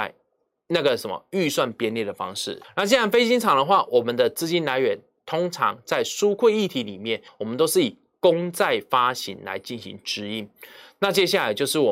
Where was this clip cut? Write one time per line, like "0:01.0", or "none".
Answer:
0:02.6
0:07.3